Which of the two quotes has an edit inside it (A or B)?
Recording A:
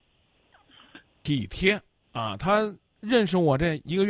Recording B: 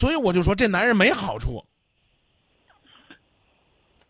A